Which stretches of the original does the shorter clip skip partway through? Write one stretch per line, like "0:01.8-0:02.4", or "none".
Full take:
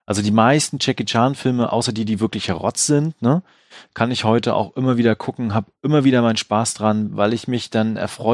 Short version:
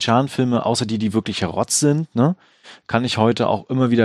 none